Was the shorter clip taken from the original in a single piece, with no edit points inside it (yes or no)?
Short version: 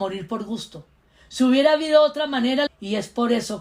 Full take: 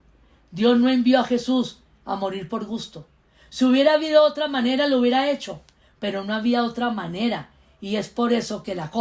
no